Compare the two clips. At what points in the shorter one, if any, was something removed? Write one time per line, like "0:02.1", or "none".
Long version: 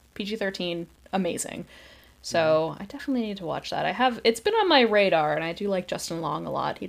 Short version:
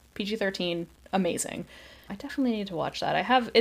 0:02.1